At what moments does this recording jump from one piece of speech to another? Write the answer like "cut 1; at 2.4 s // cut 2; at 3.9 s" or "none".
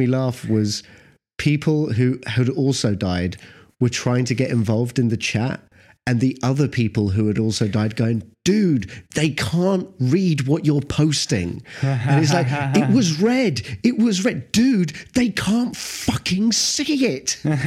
none